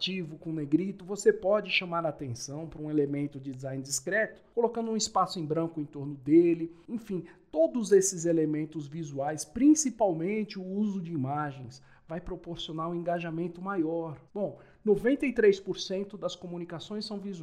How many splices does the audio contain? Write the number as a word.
one